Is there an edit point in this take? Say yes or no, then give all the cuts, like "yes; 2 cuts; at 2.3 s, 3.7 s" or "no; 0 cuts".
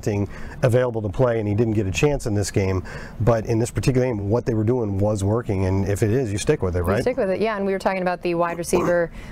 no; 0 cuts